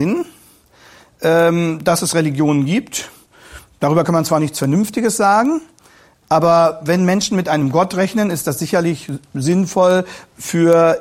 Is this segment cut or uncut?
uncut